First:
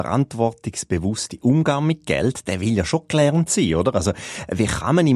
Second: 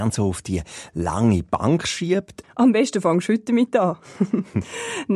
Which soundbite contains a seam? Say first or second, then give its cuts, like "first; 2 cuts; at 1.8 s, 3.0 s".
second; 1 cut; at 2.4 s